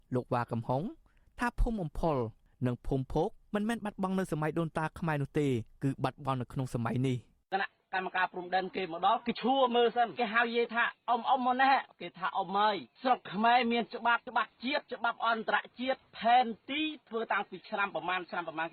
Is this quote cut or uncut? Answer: uncut